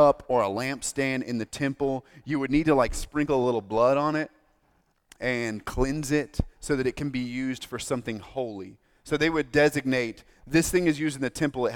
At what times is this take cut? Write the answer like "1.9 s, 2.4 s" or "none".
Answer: none